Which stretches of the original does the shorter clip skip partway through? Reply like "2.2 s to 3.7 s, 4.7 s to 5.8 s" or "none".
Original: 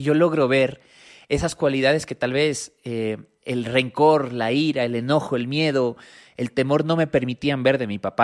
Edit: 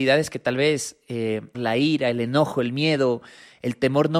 3.3 s to 4.3 s